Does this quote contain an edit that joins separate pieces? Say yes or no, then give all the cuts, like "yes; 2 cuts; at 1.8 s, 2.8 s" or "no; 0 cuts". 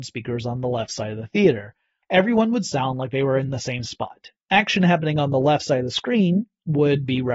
yes; 2 cuts; at 2.0 s, 4.4 s